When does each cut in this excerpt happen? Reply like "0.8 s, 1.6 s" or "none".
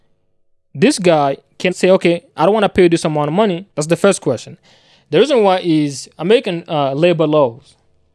1.7 s, 3.7 s